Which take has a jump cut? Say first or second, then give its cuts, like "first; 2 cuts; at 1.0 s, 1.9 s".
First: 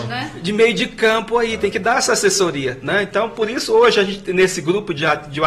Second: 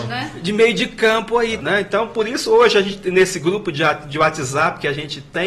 second; 1 cut; at 1.6 s